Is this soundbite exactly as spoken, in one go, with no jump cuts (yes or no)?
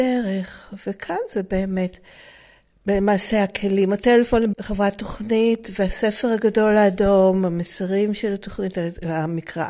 no